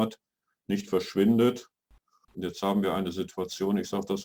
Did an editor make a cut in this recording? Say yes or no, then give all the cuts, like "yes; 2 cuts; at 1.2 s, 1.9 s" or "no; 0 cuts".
yes; 1 cut; at 2.2 s